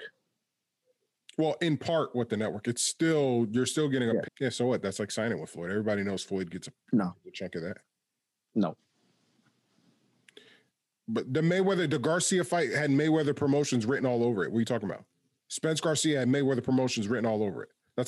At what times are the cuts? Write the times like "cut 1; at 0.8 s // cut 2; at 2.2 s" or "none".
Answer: cut 1; at 4.2 s